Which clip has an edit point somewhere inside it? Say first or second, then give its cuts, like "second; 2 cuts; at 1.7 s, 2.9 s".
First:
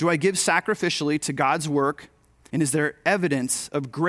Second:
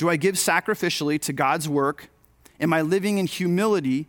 first; 1 cut; at 2.5 s